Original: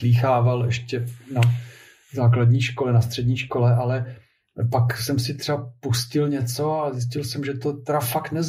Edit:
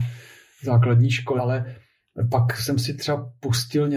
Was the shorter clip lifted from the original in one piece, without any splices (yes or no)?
no